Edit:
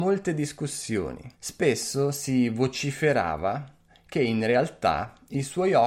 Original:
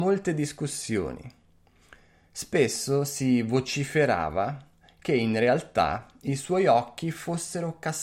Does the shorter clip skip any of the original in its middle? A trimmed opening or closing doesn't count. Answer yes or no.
yes